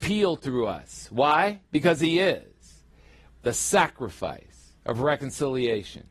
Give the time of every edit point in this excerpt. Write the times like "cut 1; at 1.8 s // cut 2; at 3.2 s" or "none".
cut 1; at 3.3 s // cut 2; at 4.8 s